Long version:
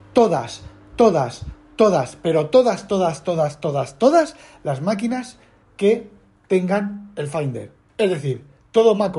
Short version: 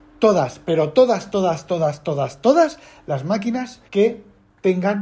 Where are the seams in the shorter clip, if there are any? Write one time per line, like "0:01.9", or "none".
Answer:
0:03.9